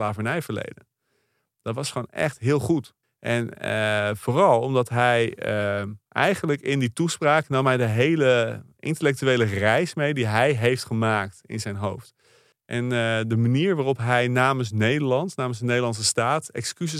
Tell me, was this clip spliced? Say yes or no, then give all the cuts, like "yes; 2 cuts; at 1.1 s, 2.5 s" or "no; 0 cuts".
yes; 2 cuts; at 3.0 s, 12.5 s